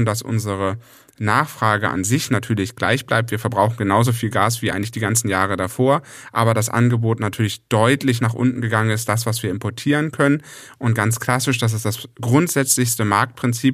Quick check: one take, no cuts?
yes; 0 cuts

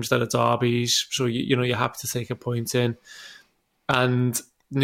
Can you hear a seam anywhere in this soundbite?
no; 0 cuts

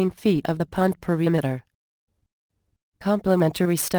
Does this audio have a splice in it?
yes; 1 cut; at 2.9 s

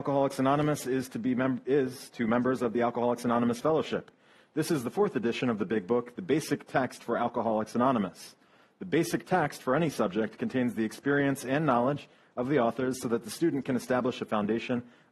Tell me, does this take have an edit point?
no; 0 cuts

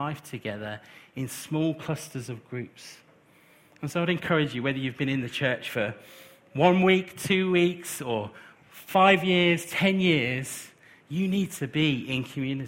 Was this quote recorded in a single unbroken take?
yes; 0 cuts

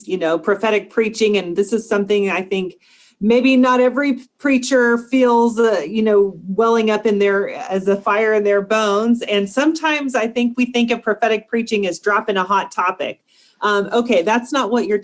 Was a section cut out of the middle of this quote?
no; 0 cuts

